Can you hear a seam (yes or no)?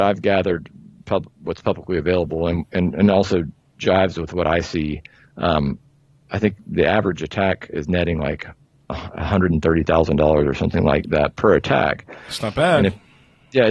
no